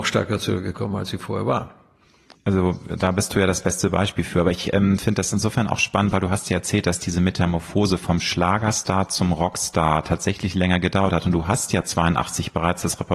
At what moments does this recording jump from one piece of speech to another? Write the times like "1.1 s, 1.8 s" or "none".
none